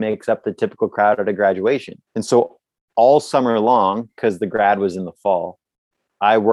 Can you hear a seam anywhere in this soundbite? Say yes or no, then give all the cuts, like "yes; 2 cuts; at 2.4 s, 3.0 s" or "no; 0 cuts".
yes; 1 cut; at 2.1 s